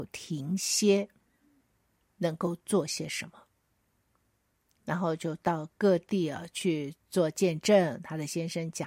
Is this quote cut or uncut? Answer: cut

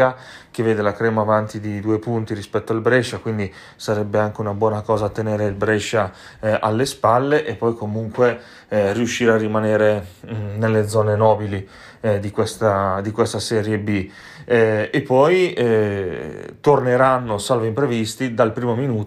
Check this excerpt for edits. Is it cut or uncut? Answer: uncut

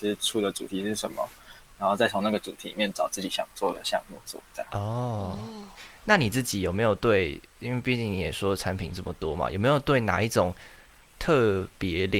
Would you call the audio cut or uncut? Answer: uncut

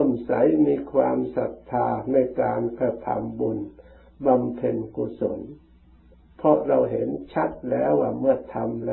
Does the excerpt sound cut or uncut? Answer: uncut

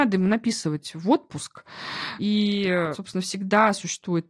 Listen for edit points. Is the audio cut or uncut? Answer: uncut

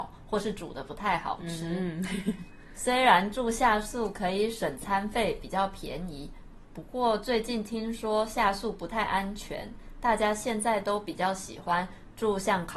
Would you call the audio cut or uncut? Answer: uncut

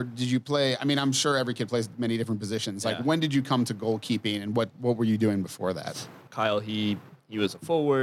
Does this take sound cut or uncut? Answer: cut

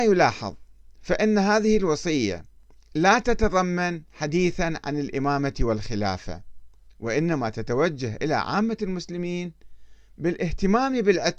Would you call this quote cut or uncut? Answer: uncut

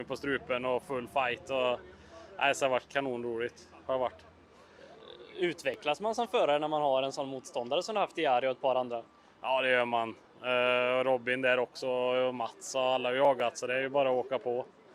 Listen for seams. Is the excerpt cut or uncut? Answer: uncut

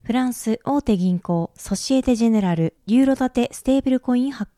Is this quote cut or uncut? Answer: uncut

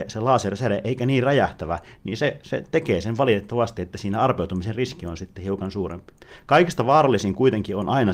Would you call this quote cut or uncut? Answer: uncut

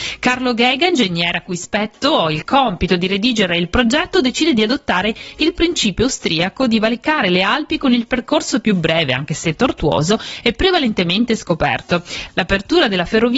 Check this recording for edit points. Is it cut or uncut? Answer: cut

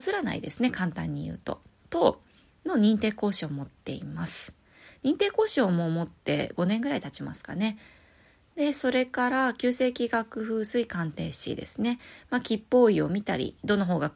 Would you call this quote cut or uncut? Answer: uncut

